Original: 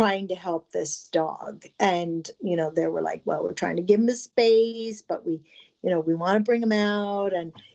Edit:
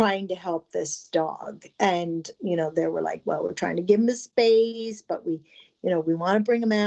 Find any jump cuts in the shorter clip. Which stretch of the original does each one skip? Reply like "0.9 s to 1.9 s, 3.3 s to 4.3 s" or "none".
none